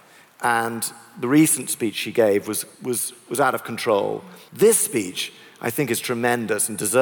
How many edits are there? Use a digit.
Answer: 1